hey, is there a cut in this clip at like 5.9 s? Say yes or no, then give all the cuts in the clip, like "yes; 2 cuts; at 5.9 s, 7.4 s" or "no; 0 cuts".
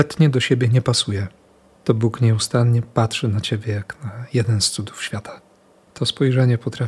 yes; 1 cut; at 5.9 s